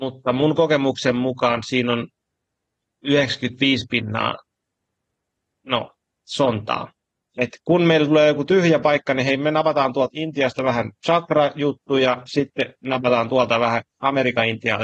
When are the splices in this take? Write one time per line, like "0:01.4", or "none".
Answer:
0:07.2